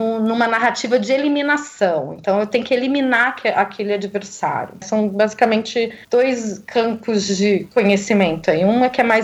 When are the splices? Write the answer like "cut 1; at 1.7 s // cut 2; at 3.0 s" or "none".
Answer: cut 1; at 4.8 s // cut 2; at 6.0 s